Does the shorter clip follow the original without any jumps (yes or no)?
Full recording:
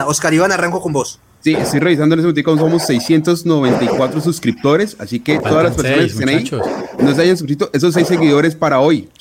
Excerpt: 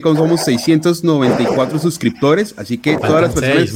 yes